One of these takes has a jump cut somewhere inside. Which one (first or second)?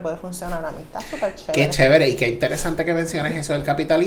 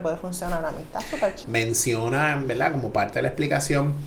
second